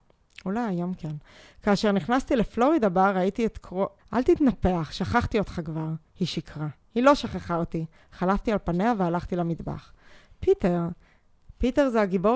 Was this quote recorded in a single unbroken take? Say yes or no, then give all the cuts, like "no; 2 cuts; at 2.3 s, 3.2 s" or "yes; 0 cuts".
no; 1 cut; at 4.0 s